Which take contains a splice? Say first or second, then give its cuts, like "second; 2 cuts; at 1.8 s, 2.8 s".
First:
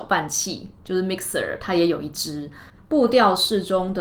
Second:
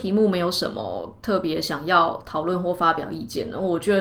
first; 1 cut; at 2.8 s